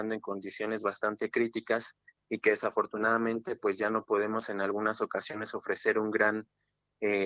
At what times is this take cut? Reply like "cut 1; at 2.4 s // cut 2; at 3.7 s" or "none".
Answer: none